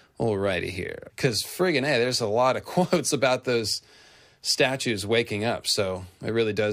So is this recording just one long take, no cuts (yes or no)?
no